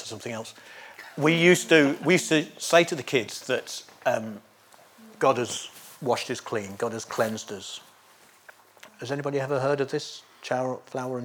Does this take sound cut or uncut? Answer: cut